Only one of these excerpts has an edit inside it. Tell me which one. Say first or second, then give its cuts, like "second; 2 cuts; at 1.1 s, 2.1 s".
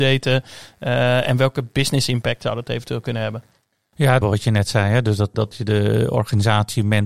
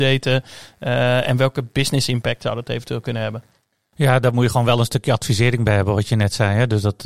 first; 2 cuts; at 4.2 s, 5.3 s